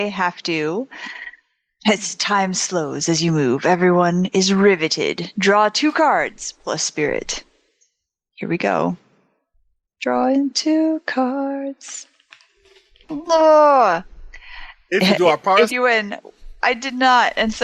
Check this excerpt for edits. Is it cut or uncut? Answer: cut